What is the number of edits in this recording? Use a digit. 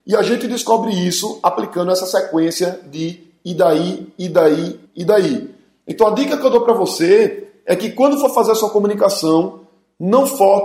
1